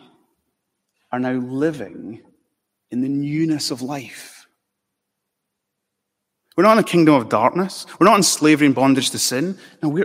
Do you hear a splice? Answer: no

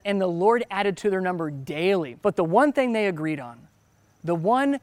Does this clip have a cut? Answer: yes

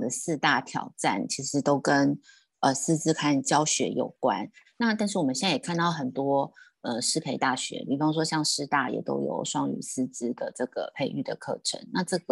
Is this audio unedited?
yes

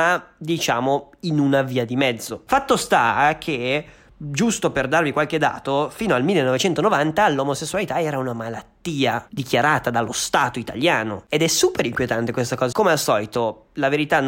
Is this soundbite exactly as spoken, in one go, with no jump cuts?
no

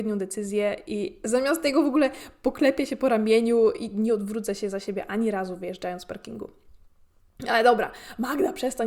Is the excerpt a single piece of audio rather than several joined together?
yes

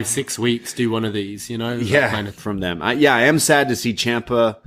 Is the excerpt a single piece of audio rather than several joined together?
no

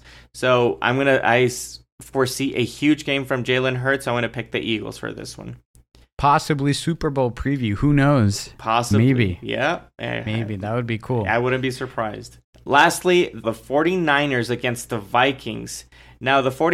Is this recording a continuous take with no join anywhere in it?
no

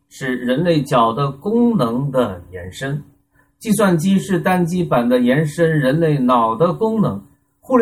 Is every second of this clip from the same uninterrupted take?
yes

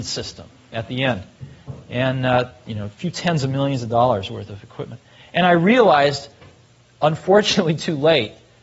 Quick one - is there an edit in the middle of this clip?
no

